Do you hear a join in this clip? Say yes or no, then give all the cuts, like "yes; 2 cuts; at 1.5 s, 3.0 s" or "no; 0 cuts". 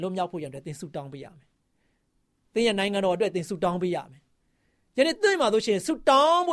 no; 0 cuts